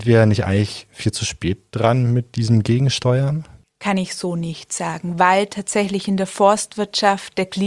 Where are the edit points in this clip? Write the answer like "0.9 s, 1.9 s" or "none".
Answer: none

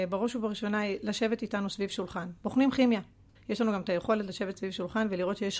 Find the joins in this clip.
3.4 s

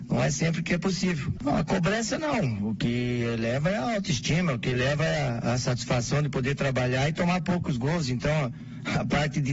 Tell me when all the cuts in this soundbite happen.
1.4 s

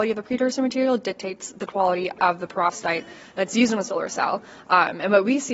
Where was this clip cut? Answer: none

